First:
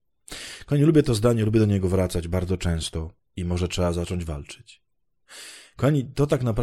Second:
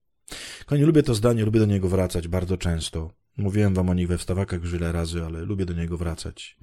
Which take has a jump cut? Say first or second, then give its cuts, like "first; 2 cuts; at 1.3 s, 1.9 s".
first; 1 cut; at 3.2 s